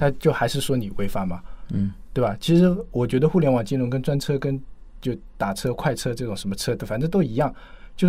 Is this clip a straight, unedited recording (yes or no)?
yes